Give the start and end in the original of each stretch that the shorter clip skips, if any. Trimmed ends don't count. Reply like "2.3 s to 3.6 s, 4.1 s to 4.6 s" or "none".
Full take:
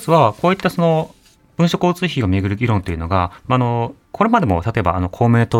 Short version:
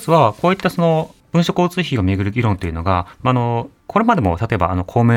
1.2 s to 1.4 s